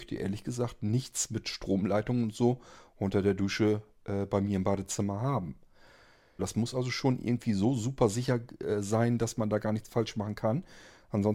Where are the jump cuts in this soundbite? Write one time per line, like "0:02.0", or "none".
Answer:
0:06.4